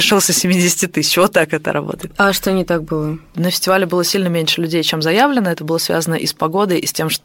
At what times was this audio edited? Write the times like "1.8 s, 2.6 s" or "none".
none